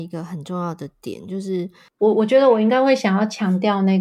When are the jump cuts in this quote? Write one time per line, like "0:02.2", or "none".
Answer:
0:02.0